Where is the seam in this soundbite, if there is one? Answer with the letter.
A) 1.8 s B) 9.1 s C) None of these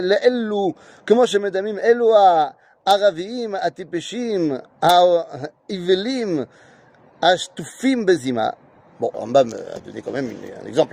B